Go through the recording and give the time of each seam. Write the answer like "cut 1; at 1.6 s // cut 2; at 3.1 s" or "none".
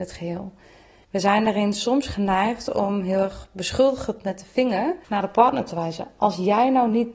cut 1; at 1.0 s // cut 2; at 5.0 s